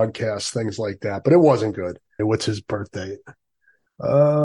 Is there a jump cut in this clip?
yes; 1 cut; at 2.2 s

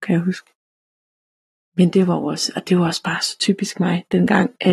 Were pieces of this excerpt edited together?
no; 0 cuts

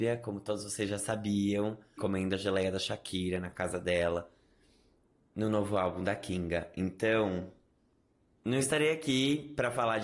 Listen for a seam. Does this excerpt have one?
yes; 1 cut; at 2.0 s

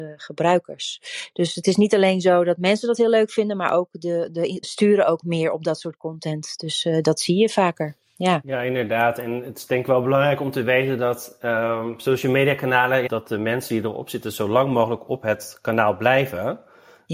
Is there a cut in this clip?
yes; 2 cuts; at 4.6 s, 13.1 s

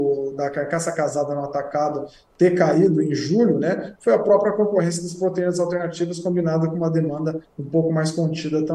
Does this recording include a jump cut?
no; 0 cuts

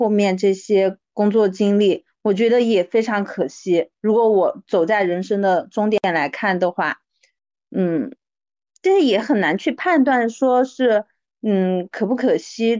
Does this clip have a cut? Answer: no; 0 cuts

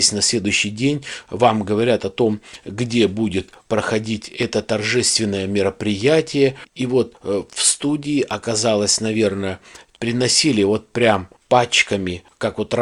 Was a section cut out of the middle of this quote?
yes; 2 cuts; at 6.7 s, 9.9 s

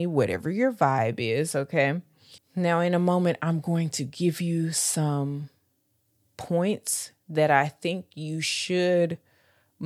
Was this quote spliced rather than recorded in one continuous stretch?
yes; 1 cut; at 2.4 s

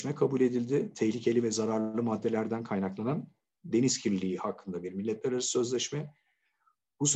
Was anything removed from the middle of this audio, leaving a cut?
no; 0 cuts

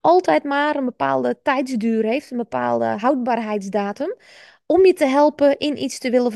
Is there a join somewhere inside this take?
no; 0 cuts

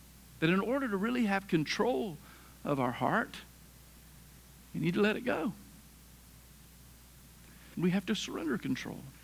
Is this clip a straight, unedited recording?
no; 1 cut; at 7.7 s

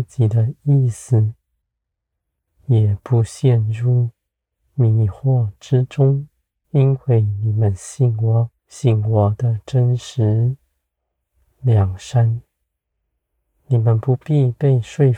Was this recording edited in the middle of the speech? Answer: yes; 2 cuts; at 6.6 s, 8.6 s

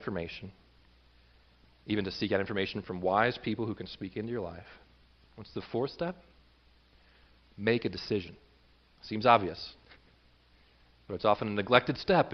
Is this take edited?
yes; 2 cuts; at 5.3 s, 9.0 s

